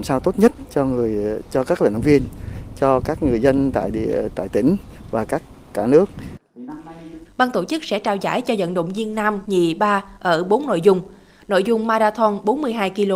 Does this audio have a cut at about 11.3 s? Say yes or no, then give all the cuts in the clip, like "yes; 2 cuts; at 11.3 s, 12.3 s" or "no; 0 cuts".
no; 2 cuts; at 7.3 s, 9.4 s